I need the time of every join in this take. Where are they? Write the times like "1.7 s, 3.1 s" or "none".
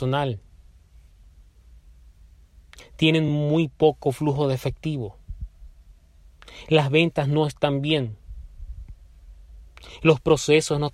none